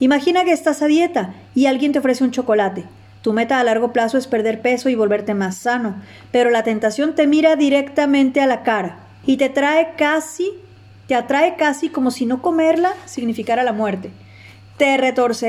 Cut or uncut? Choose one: cut